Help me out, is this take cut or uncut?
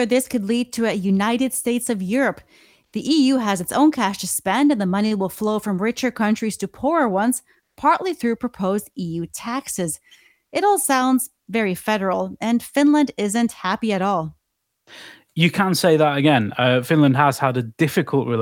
uncut